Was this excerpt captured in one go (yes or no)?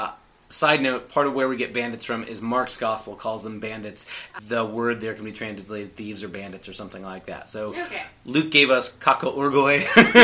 no